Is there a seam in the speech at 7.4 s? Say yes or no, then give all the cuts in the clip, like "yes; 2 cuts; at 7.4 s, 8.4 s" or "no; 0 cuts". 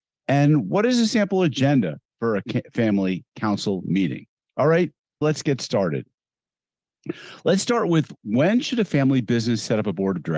no; 1 cut; at 5.2 s